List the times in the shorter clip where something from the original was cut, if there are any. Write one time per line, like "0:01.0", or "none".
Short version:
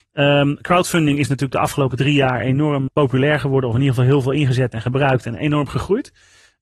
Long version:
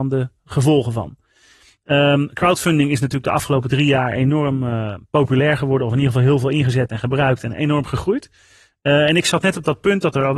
0:02.9

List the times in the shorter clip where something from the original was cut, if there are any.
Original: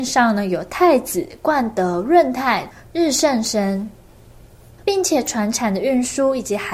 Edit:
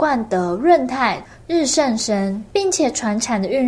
0:02.5

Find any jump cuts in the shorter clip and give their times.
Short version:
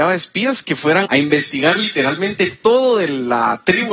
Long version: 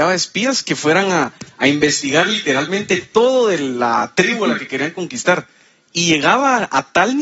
0:01.1

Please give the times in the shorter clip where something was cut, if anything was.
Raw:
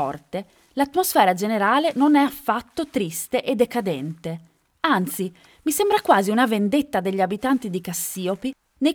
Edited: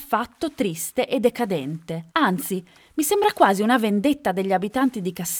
0:02.1

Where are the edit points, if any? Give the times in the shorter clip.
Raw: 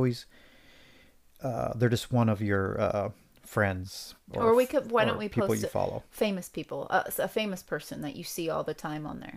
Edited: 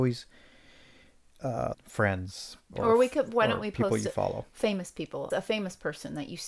0:01.7
0:05.3

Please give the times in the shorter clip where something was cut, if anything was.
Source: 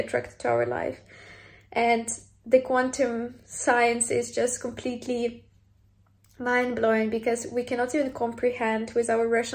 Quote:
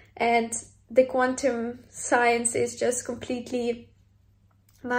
none

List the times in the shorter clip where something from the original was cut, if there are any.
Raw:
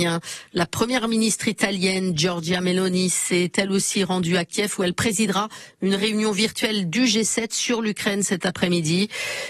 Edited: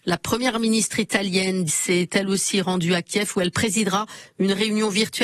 0:01.7

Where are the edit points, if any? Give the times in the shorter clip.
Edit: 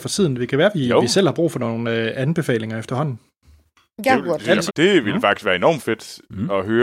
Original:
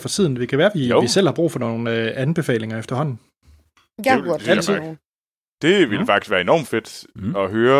0:04.7

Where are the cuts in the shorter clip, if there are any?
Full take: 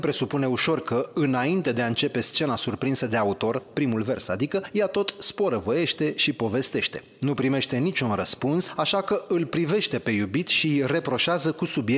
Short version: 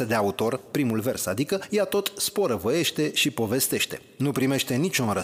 none

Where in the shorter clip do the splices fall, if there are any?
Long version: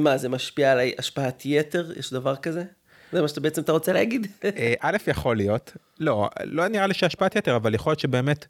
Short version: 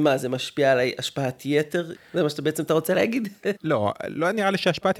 0:01.9
0:03.6

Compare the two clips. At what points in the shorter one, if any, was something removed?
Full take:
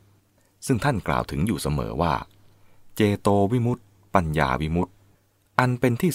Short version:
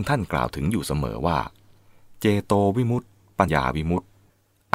0:03.5

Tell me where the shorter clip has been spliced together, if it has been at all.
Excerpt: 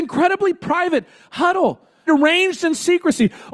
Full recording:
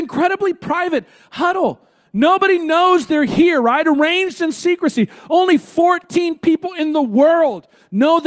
0:02.1

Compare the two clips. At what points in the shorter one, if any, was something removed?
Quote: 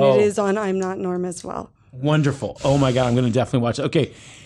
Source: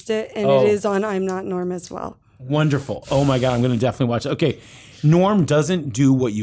none

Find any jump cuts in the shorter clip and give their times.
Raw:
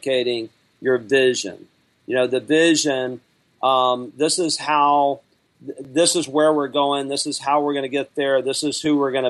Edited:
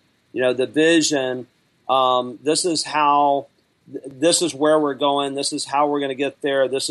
none

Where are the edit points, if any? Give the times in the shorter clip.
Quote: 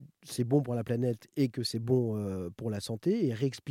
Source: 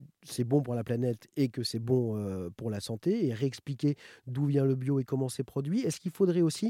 none

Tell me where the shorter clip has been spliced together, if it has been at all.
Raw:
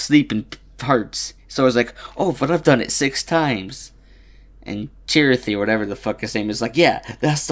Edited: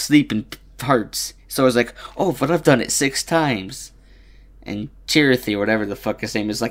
none

